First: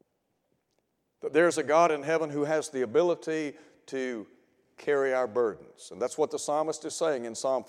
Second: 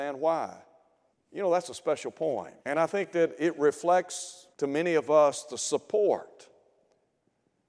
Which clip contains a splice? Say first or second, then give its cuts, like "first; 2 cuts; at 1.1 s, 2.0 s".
second; 3 cuts; at 1.1 s, 2.6 s, 4.5 s